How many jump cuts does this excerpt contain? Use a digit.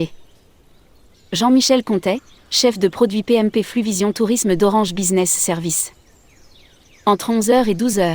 2